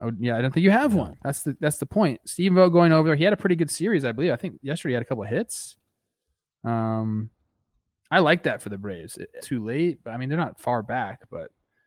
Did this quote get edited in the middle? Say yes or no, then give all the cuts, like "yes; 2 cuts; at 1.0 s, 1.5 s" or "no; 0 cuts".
yes; 1 cut; at 9.4 s